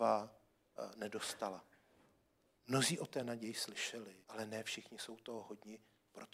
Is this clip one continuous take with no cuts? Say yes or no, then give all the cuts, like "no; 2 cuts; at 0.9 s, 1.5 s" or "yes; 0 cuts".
no; 2 cuts; at 2.6 s, 4.2 s